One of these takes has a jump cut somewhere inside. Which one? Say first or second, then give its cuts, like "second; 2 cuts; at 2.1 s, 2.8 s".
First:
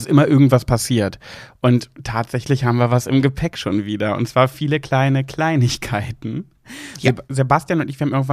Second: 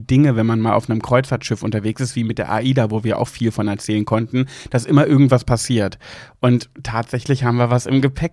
first; 1 cut; at 7.3 s